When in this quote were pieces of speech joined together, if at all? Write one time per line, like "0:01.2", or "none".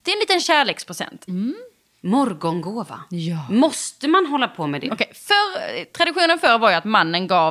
0:01.3
0:04.9